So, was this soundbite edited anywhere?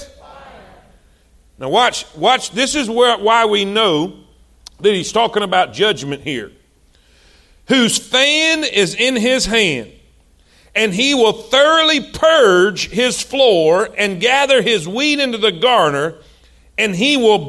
no; 0 cuts

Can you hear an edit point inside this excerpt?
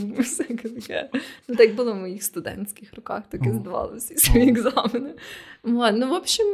no; 0 cuts

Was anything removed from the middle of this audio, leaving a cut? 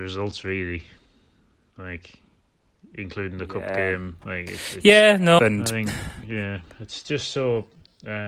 yes; 1 cut; at 5.4 s

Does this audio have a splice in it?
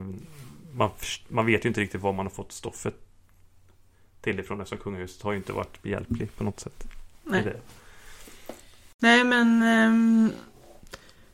no; 0 cuts

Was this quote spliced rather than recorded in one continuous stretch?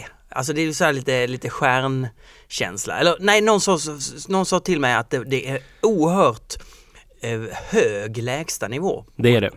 no; 0 cuts

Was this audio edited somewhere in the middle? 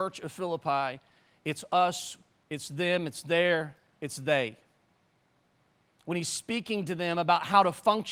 yes; 1 cut; at 2.4 s

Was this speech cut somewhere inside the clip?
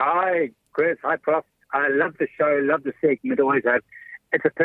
no; 0 cuts

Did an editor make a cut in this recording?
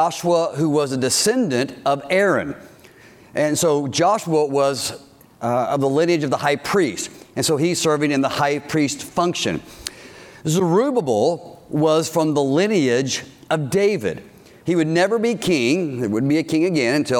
no; 0 cuts

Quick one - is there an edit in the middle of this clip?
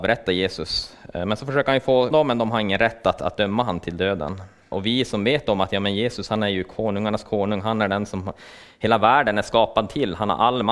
yes; 2 cuts; at 2.1 s, 4.7 s

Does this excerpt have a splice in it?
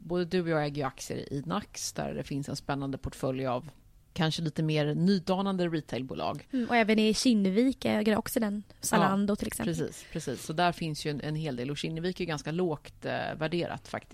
no; 0 cuts

